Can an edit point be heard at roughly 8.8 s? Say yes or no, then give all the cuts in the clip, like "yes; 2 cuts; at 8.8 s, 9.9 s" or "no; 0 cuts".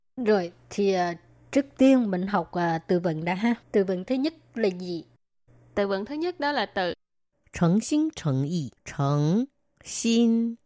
yes; 2 cuts; at 3.6 s, 8.8 s